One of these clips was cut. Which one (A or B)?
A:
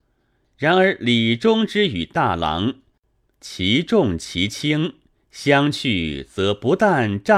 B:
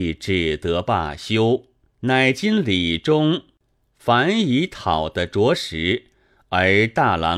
B